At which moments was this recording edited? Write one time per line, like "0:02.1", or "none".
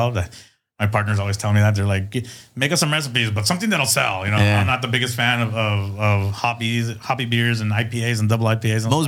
none